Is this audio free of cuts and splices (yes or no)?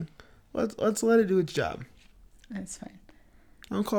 yes